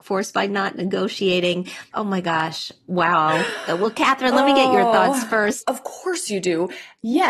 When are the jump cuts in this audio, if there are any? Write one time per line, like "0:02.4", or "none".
0:01.9
0:05.6